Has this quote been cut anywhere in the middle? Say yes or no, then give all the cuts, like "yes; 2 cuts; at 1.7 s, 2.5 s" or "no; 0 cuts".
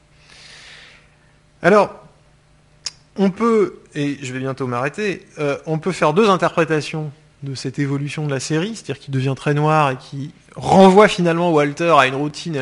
no; 0 cuts